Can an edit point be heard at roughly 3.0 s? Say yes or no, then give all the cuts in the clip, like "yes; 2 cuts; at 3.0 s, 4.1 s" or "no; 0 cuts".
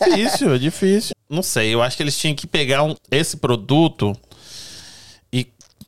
yes; 2 cuts; at 1.1 s, 3.0 s